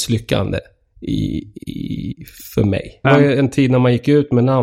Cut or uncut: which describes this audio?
cut